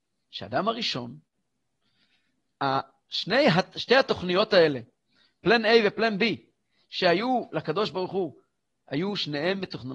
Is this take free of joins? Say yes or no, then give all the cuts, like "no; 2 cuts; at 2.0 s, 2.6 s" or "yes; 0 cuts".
yes; 0 cuts